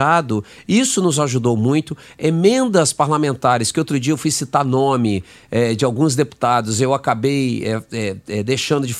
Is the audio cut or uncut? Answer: uncut